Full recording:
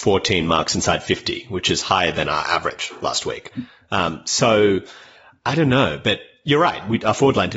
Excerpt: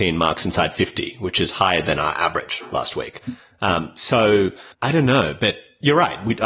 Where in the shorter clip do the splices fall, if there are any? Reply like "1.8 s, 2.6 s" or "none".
4.7 s